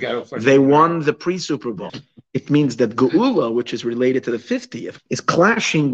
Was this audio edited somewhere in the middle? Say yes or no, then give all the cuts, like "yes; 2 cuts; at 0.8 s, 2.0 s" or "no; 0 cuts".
yes; 2 cuts; at 1.9 s, 5.0 s